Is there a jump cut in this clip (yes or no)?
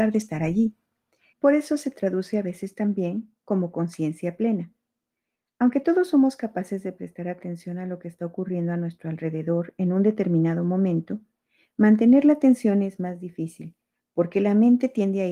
yes